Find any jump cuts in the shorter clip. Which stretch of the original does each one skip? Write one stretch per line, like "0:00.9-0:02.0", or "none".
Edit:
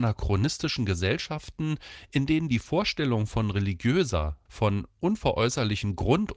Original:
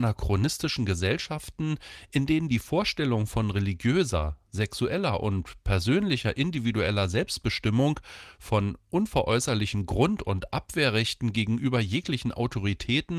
0:04.5-0:08.4